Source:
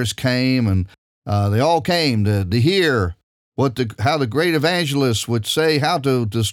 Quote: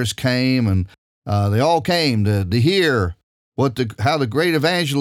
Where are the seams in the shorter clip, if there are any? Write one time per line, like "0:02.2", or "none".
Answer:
none

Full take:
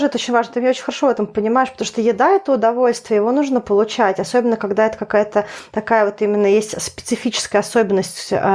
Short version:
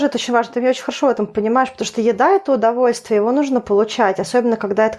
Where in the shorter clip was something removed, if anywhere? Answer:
none

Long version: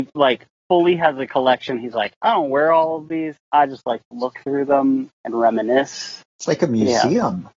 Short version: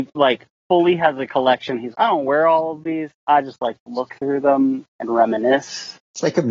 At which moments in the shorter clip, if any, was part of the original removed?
0:01.9

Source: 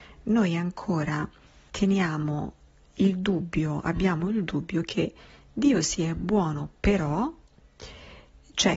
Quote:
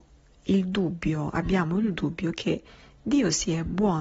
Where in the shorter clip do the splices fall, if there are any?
none

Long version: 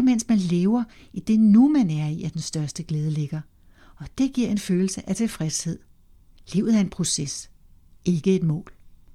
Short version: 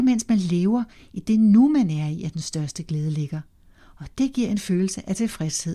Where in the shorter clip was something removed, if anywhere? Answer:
none

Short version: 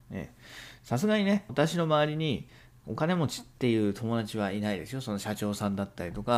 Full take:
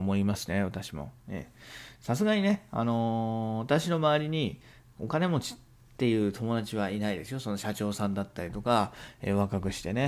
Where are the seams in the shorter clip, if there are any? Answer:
0:01.5
0:03.5

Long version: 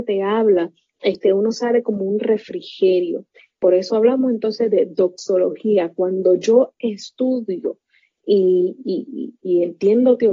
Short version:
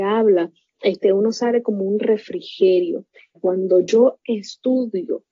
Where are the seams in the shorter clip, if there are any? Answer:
0:03.3

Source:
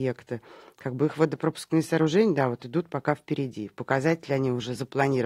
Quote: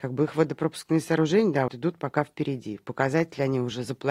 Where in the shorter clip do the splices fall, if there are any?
0:01.7

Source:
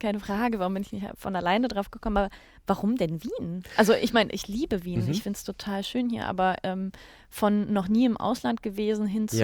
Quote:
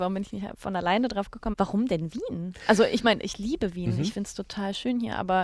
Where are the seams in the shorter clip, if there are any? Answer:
0:01.5

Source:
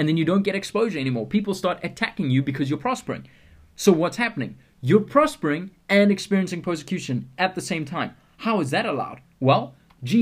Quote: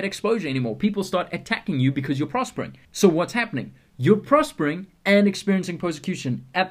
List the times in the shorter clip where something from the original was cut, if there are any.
0:02.8

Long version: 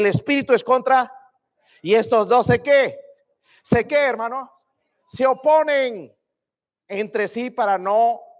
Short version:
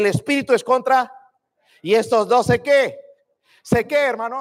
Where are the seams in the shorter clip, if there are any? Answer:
none

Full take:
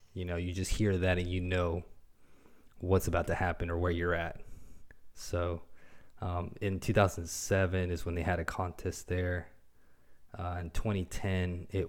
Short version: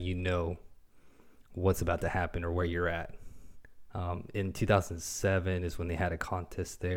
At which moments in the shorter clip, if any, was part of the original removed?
0:03.9

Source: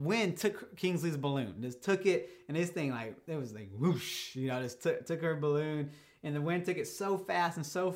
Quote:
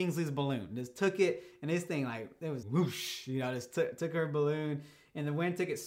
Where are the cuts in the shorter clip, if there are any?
0:02.6

